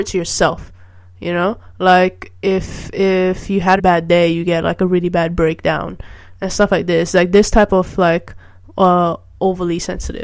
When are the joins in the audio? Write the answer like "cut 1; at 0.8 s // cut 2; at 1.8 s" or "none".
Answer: cut 1; at 3.8 s

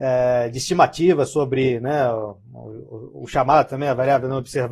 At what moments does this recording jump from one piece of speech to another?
none

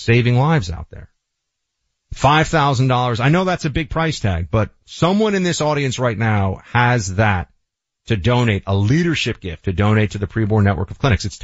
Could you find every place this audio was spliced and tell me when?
none

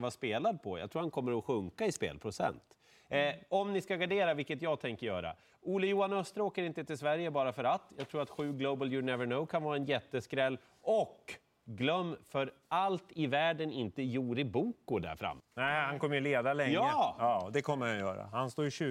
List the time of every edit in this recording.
cut 1; at 15.4 s

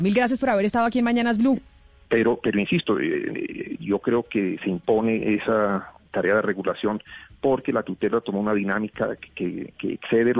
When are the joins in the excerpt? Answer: cut 1; at 2.1 s // cut 2; at 3.8 s

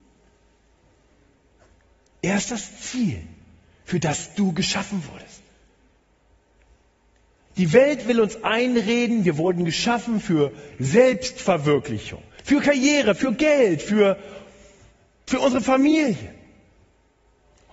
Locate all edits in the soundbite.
cut 1; at 12.3 s

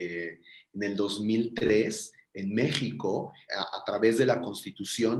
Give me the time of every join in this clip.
cut 1; at 3.5 s

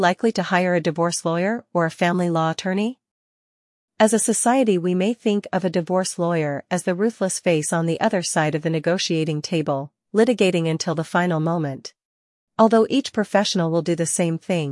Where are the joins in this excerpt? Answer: cut 1; at 12.5 s

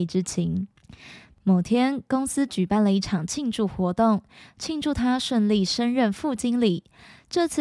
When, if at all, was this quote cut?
none

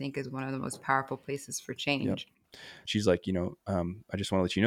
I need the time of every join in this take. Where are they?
cut 1; at 2.8 s

